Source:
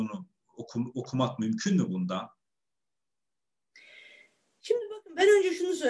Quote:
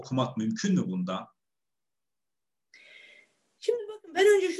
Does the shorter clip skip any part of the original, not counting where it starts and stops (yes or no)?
no